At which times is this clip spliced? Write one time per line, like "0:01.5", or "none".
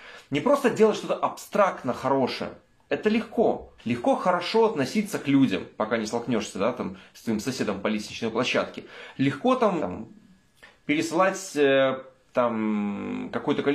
0:03.8
0:09.8